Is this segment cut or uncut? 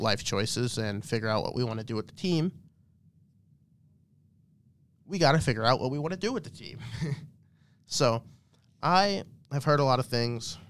uncut